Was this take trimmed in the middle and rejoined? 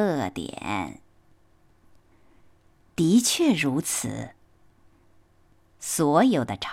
no; 0 cuts

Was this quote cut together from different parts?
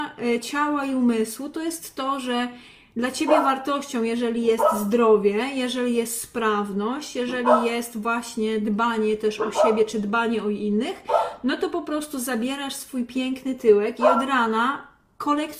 no; 0 cuts

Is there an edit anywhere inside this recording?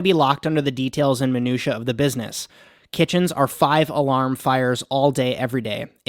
no; 0 cuts

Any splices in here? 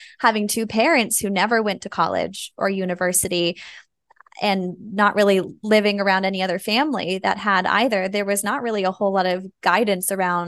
no; 0 cuts

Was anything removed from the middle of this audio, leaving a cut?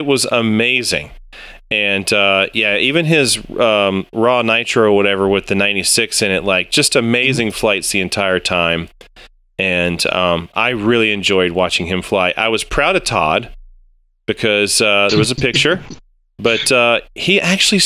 no; 0 cuts

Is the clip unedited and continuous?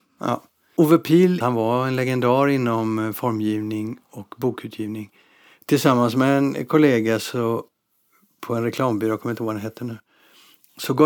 yes; 0 cuts

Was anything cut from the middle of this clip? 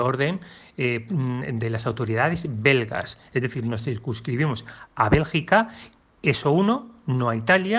yes; 1 cut; at 1.1 s

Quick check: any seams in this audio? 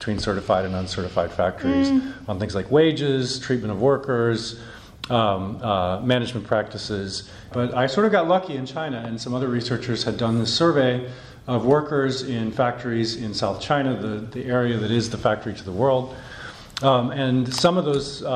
yes; 1 cut; at 7.5 s

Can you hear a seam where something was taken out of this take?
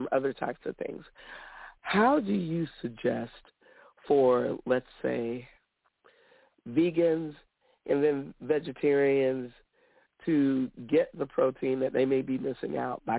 no; 0 cuts

